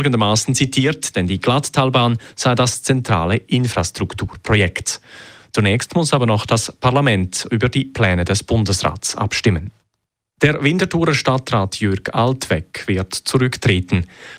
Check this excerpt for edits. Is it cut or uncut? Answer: cut